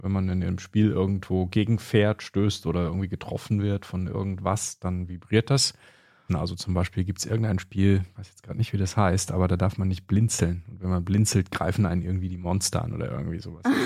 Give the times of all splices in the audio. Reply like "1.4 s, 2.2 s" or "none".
6.3 s